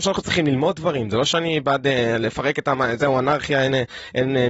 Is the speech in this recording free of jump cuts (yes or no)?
yes